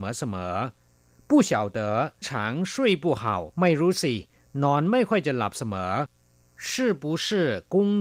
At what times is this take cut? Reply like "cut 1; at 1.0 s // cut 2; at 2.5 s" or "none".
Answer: cut 1; at 2.2 s // cut 2; at 3.5 s